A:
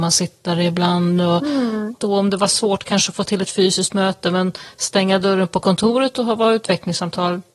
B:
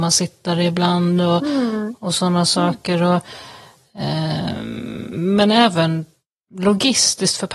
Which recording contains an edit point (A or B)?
A